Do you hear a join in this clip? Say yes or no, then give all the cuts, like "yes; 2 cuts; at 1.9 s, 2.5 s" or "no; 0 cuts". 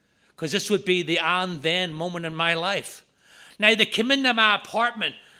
no; 0 cuts